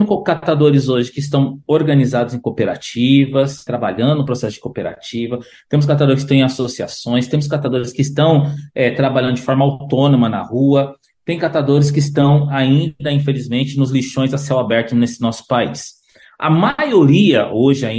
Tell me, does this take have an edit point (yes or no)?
no